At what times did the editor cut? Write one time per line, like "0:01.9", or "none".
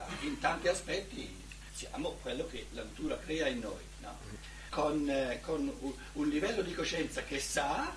0:04.7